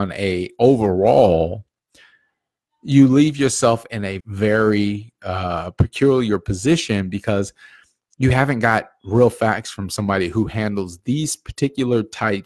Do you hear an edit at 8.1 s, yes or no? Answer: no